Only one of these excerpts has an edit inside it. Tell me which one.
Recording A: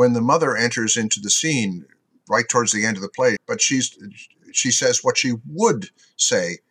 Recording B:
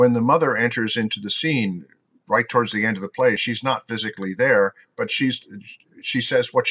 A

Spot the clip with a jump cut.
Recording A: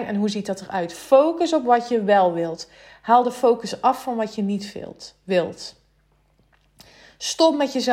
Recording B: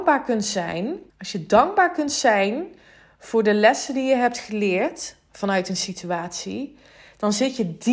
B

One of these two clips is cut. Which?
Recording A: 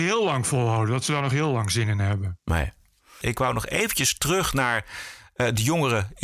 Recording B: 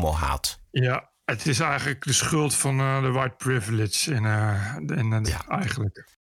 B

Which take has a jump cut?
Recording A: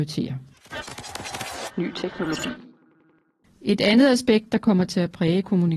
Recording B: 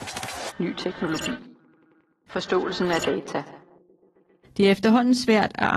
B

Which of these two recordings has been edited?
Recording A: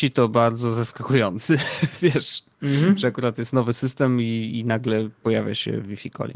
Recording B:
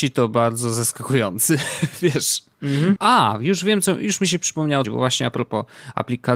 B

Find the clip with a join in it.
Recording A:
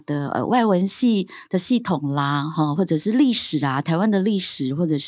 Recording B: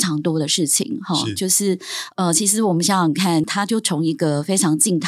B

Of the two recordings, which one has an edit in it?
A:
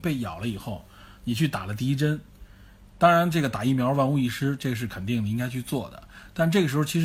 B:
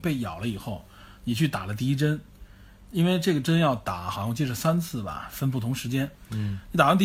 A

